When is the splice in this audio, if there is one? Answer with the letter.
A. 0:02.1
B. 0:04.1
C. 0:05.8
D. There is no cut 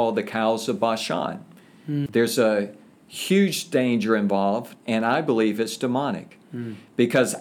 A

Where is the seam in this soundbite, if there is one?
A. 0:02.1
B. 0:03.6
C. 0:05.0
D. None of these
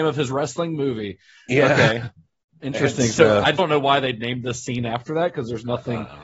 B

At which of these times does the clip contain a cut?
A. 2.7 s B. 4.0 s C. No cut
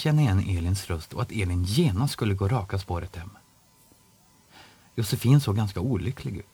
C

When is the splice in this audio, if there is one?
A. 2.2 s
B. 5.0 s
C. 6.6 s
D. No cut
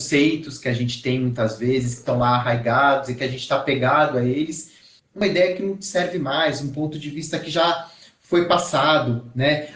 B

